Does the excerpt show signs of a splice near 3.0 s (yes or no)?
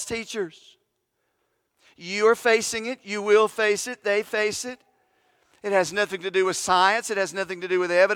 no